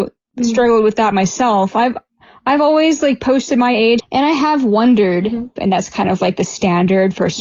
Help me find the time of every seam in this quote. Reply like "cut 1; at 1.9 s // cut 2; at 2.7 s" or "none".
cut 1; at 4.0 s // cut 2; at 5.6 s